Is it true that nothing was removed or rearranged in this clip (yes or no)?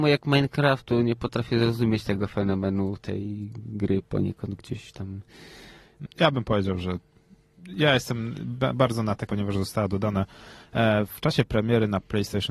no